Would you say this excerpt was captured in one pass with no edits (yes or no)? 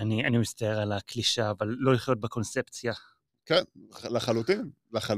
yes